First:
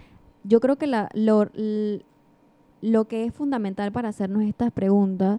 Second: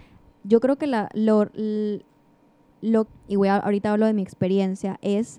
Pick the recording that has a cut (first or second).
second